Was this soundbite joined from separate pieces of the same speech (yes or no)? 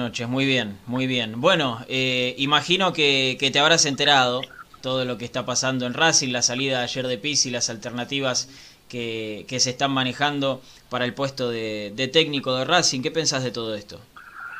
no